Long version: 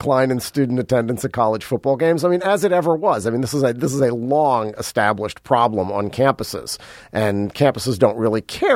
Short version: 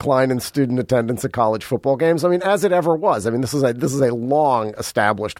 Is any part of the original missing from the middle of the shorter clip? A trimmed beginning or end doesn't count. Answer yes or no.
no